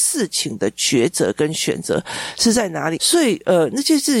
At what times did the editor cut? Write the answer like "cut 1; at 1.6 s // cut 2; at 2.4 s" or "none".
cut 1; at 3.0 s